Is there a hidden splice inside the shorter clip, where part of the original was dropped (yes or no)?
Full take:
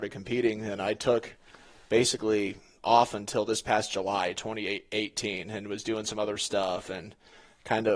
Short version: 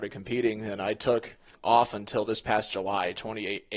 yes